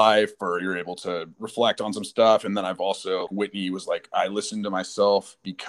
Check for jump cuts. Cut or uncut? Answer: cut